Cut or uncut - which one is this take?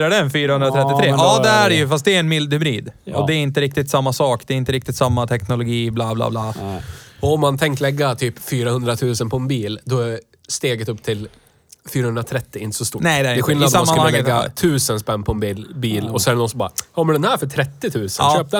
uncut